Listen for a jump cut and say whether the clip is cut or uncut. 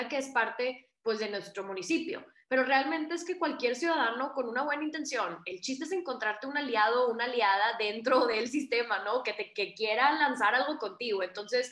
uncut